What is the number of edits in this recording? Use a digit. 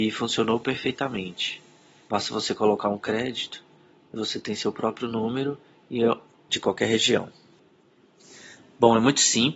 2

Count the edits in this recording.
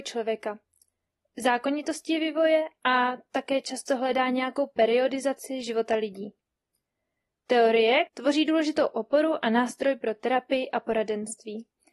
1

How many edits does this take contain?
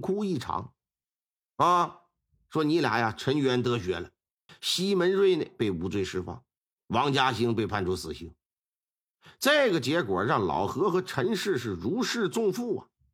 1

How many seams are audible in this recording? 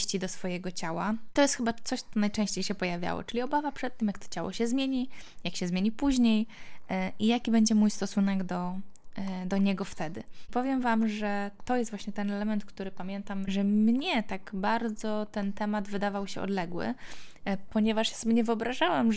0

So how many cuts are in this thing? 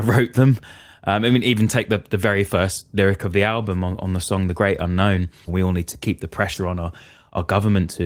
1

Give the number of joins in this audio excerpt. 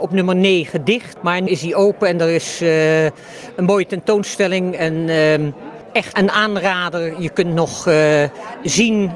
2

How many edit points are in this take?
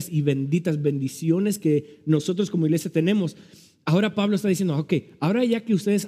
0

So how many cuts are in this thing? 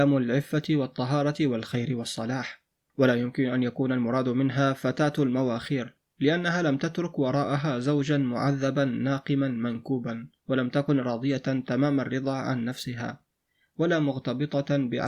1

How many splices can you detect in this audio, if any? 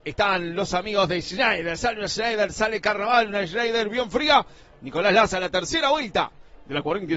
0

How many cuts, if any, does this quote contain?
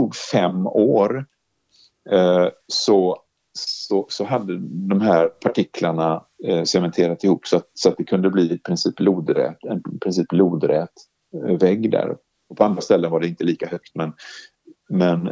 0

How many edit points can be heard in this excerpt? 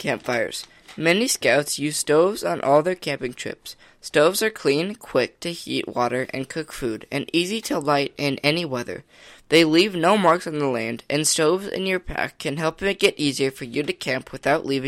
0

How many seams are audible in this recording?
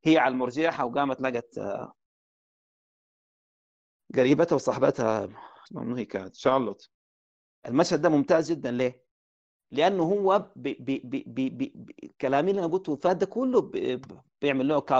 0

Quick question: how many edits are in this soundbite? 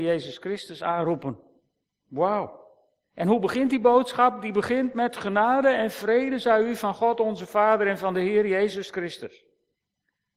1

